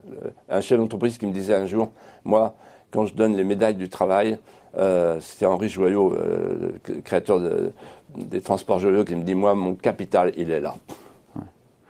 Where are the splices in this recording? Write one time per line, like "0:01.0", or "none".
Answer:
0:09.1

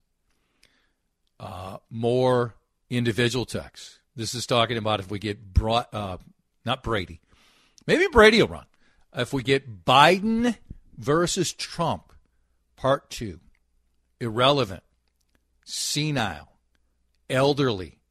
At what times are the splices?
none

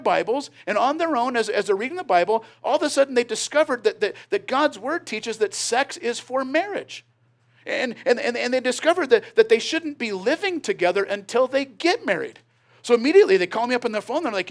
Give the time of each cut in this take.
none

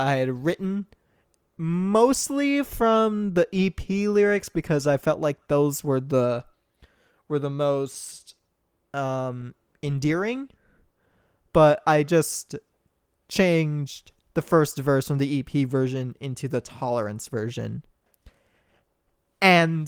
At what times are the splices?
none

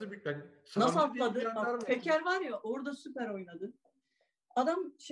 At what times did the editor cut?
none

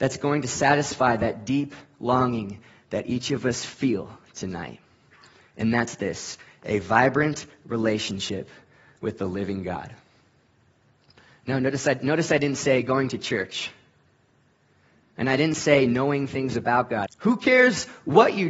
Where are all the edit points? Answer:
0:15.1
0:17.1

